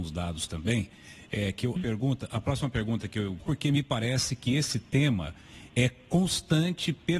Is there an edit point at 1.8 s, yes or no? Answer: yes